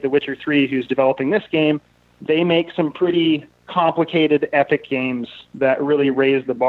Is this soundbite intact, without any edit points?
yes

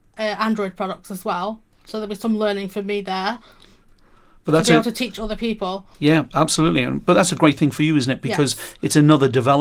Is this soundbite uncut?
no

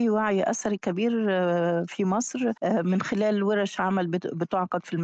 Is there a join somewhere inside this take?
yes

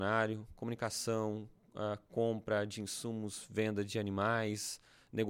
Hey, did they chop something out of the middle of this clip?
no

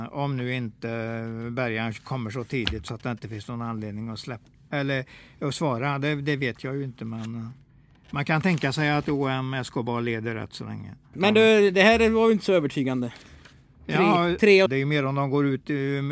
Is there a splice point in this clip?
yes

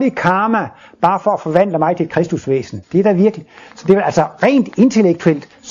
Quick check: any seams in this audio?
yes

